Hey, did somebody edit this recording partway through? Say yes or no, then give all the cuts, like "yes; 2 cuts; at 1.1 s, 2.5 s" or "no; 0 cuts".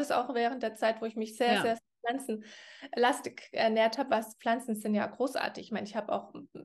no; 0 cuts